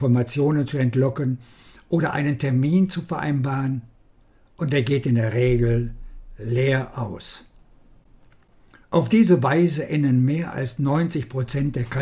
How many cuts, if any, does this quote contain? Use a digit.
0